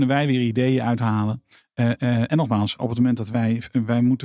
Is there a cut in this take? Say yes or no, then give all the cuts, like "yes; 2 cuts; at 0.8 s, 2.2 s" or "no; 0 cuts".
yes; 1 cut; at 2.3 s